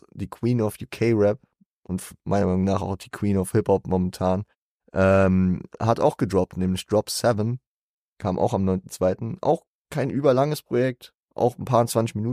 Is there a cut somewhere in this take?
no; 0 cuts

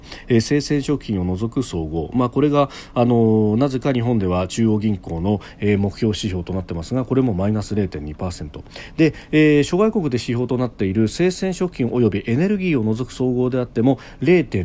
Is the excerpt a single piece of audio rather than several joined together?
yes; 0 cuts

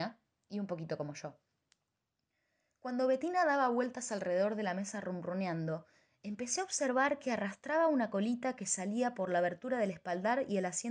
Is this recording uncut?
yes; 0 cuts

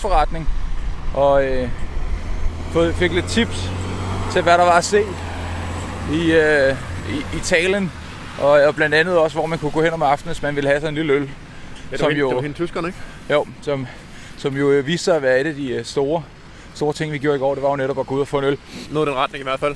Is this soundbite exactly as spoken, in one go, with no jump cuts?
no; 1 cut; at 18.9 s

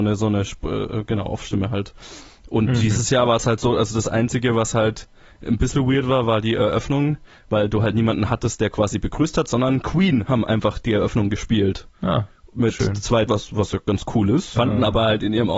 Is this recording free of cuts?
no; 2 cuts; at 13.3 s, 14.6 s

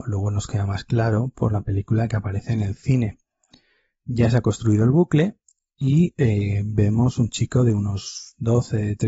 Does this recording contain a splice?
no; 0 cuts

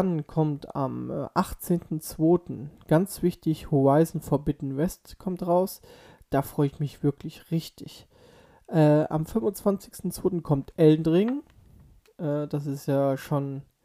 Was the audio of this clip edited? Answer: no; 0 cuts

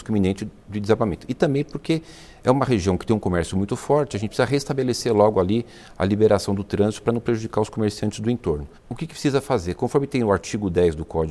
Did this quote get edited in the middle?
yes; 1 cut; at 8.8 s

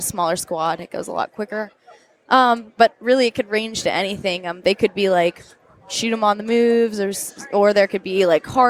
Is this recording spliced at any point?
no; 0 cuts

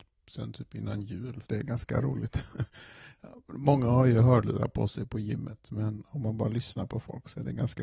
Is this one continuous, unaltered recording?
no; 1 cut; at 1.4 s

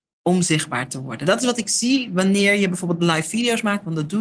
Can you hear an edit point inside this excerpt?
no; 0 cuts

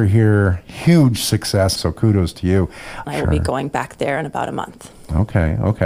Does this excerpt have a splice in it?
yes; 2 cuts; at 1.8 s, 3.0 s

